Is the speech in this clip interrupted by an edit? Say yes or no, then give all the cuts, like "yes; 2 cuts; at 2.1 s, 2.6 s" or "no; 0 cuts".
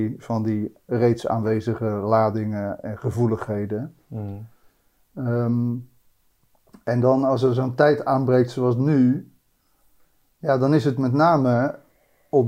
no; 0 cuts